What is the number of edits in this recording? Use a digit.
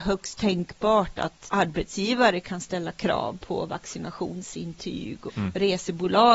2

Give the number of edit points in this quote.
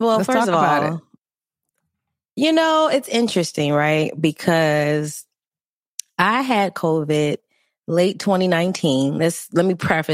0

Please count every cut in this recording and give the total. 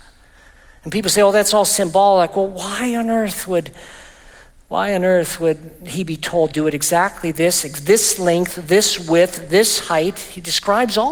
0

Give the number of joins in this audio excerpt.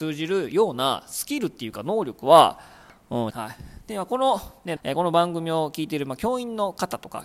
2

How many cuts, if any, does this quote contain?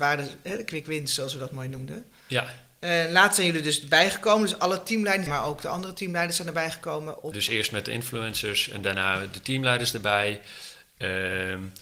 2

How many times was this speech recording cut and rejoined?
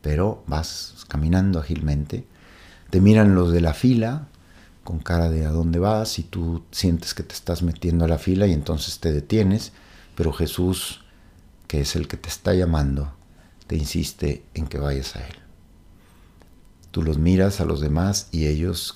0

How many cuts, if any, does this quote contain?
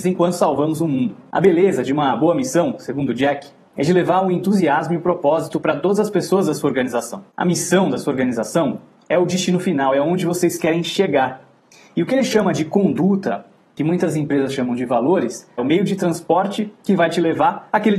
1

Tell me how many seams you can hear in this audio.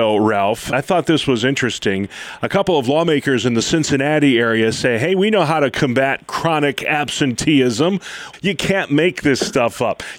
1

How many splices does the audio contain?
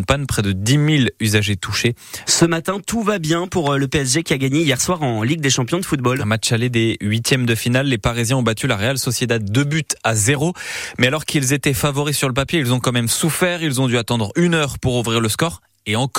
1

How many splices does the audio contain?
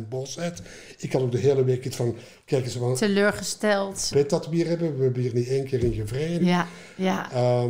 2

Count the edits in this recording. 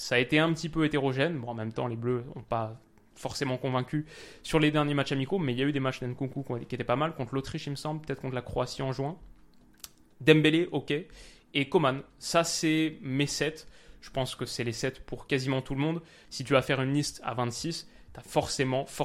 1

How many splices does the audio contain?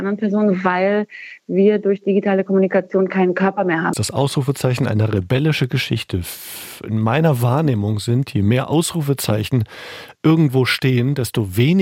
1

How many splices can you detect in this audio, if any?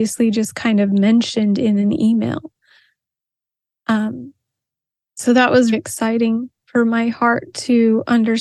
1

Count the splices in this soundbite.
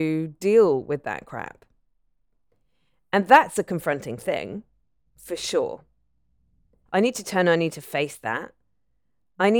1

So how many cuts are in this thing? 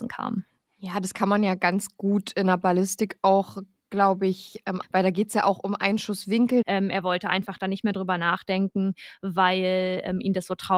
2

